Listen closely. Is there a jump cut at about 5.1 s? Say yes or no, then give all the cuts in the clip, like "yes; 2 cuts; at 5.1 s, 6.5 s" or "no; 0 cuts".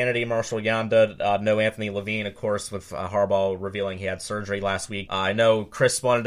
yes; 1 cut; at 5.1 s